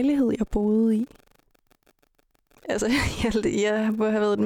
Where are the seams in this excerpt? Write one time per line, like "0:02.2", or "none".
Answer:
0:02.5